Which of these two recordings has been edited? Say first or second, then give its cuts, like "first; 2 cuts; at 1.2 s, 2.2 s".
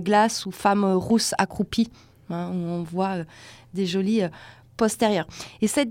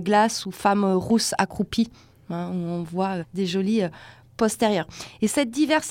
second; 1 cut; at 3.2 s